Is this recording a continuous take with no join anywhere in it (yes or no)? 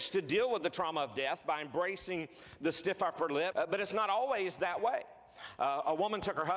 no